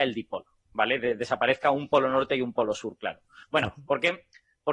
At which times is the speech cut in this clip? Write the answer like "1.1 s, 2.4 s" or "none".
3.4 s